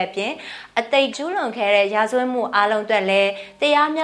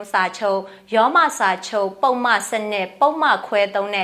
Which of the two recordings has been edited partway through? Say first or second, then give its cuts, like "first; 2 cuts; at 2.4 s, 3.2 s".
first; 1 cut; at 1.1 s